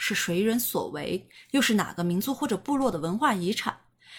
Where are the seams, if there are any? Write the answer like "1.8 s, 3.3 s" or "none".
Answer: none